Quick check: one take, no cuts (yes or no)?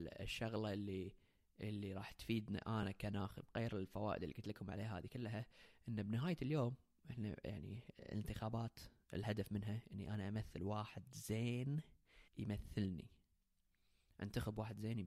no